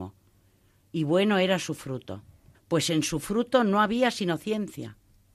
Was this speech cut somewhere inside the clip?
yes; 1 cut; at 2.5 s

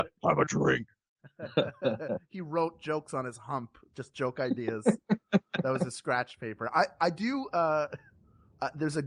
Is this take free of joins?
yes; 0 cuts

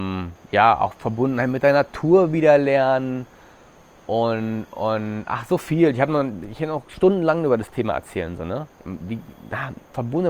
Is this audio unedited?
yes; 0 cuts

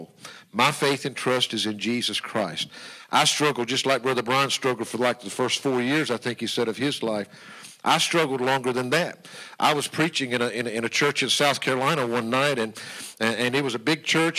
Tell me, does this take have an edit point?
no; 0 cuts

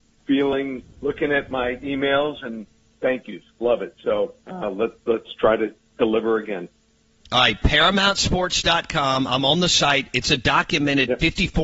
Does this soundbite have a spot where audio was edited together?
yes; 1 cut; at 4.4 s

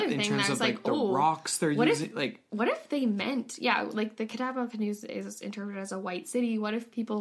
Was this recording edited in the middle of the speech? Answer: no; 0 cuts

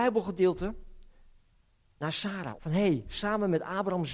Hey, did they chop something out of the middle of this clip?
yes; 1 cut; at 2.5 s

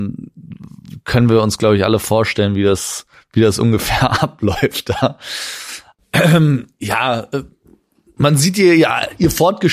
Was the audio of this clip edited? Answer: yes; 1 cut; at 5.9 s

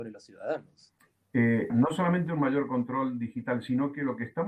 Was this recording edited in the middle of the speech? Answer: yes; 1 cut; at 1.7 s

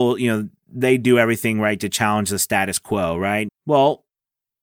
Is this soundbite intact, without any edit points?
no; 1 cut; at 3.5 s

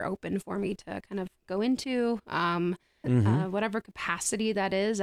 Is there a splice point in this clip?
yes; 1 cut; at 3.0 s

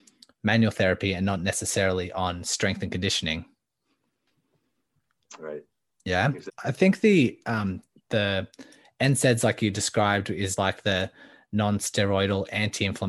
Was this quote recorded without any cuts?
no; 2 cuts; at 6.5 s, 10.6 s

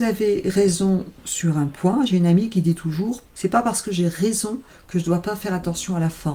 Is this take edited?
no; 0 cuts

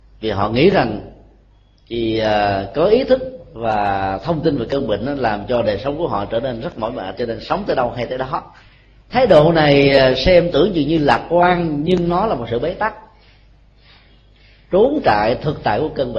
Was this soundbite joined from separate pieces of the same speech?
no; 0 cuts

